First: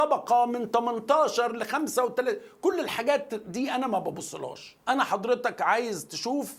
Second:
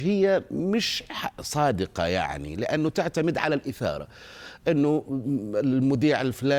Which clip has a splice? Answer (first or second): first